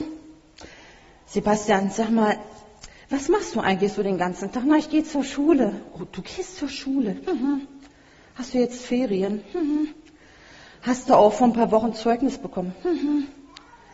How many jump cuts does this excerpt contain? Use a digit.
0